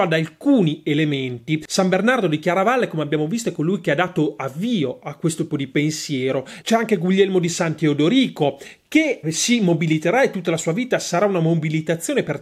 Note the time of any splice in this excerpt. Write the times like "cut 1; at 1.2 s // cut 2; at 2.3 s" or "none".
cut 1; at 5.5 s // cut 2; at 6.6 s // cut 3; at 9.2 s